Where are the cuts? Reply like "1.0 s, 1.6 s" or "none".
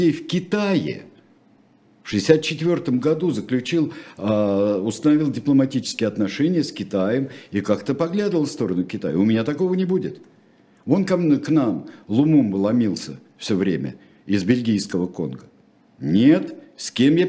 none